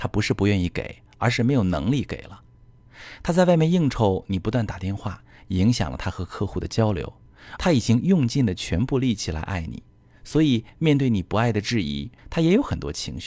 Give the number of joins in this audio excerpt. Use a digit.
2